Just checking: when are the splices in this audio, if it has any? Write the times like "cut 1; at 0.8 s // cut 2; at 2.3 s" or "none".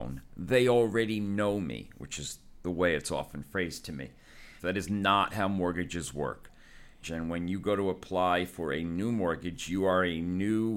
cut 1; at 4.6 s // cut 2; at 7.0 s